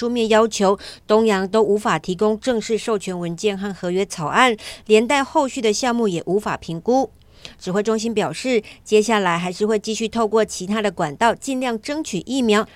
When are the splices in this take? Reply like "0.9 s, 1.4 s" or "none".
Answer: none